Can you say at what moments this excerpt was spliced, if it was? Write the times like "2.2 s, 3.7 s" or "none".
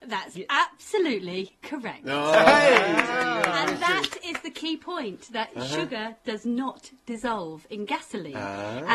none